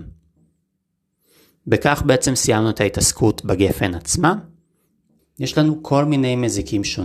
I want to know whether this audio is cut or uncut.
cut